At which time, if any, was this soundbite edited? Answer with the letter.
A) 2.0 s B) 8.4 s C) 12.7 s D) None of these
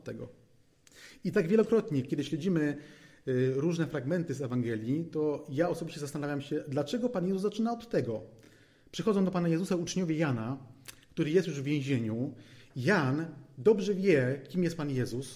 D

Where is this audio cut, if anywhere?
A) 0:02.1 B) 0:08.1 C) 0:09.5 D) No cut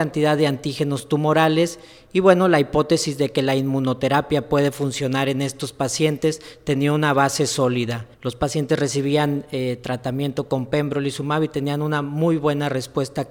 B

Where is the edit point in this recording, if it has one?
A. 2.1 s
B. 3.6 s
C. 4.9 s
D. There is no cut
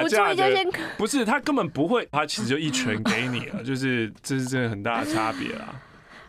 A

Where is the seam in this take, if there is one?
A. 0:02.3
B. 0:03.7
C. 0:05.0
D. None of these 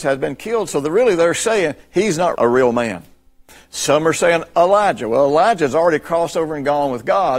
A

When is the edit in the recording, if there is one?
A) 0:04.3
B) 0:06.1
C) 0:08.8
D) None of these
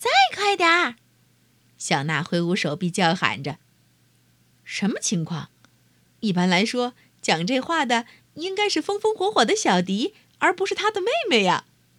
D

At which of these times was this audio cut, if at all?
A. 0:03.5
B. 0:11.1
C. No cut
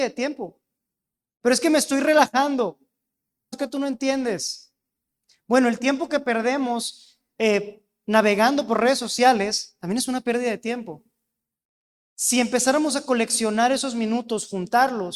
A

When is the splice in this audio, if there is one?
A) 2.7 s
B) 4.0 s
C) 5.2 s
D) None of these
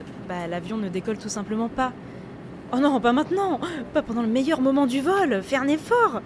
A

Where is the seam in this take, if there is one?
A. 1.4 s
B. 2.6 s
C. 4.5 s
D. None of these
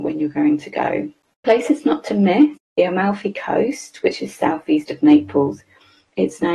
B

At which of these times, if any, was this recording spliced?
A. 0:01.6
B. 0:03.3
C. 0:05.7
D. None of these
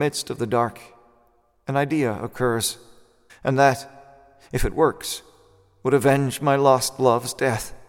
B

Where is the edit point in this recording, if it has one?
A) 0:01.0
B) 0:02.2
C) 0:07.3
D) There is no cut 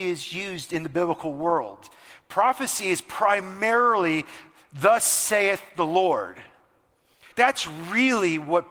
C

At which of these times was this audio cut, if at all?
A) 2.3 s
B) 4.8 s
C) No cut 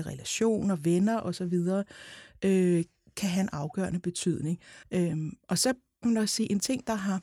B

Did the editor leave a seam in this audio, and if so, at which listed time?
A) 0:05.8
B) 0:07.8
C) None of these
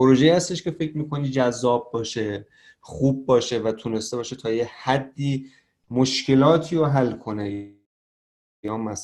C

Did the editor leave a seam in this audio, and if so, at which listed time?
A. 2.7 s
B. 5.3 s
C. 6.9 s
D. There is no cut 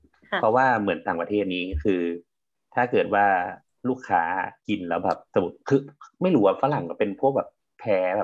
B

